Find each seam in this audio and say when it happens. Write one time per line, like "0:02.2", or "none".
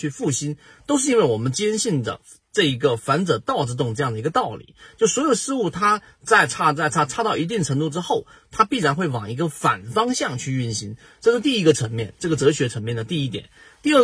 none